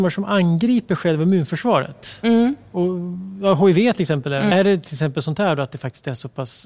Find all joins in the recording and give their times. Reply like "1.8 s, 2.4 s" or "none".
4.5 s